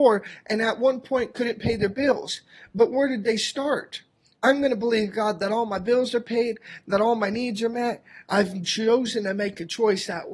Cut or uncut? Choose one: cut